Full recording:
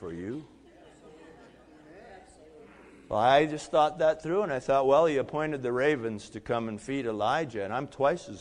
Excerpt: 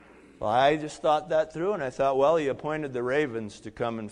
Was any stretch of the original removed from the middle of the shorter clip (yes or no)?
no